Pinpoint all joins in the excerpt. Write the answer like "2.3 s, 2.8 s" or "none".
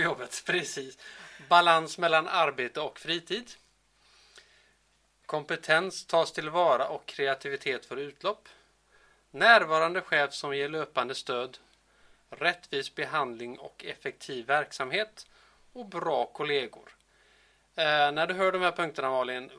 none